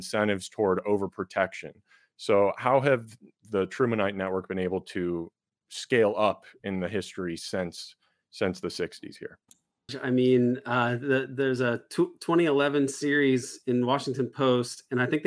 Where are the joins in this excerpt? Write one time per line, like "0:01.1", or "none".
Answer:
0:09.9